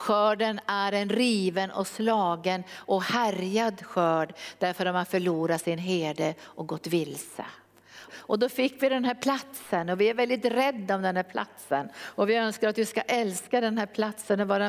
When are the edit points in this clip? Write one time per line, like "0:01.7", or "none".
0:08.1